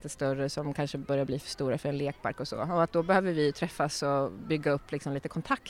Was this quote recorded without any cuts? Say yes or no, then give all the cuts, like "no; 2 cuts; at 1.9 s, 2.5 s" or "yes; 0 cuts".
yes; 0 cuts